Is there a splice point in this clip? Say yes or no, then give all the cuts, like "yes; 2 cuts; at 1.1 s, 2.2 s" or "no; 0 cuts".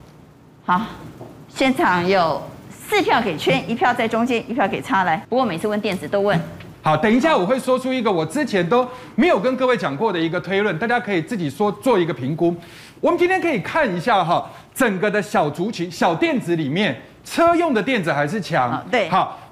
yes; 1 cut; at 6.7 s